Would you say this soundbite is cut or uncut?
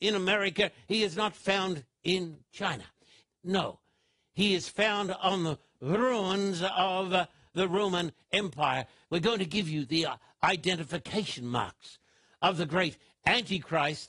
cut